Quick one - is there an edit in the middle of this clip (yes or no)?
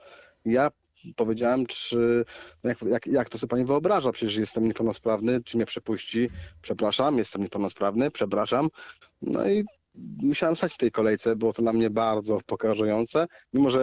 yes